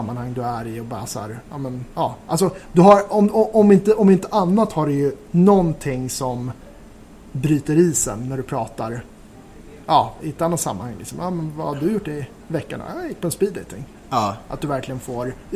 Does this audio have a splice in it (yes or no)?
yes